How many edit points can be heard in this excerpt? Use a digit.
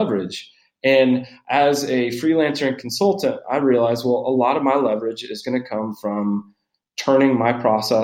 1